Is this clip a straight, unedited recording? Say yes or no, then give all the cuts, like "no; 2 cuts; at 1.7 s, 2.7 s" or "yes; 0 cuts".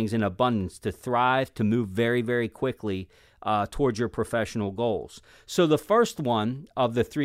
yes; 0 cuts